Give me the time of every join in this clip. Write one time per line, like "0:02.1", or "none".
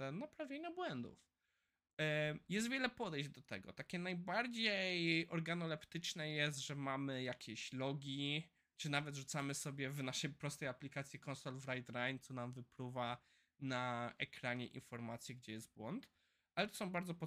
none